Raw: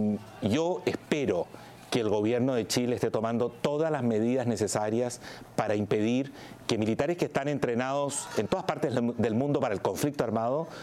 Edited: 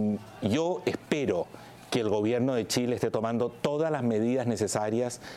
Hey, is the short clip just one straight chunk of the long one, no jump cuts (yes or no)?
yes